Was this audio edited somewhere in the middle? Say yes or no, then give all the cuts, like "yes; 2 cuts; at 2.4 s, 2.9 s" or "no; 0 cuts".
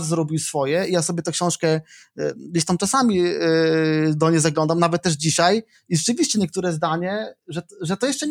no; 0 cuts